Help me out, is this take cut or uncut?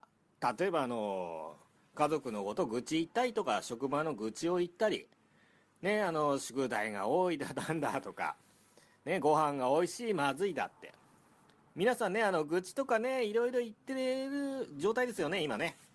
uncut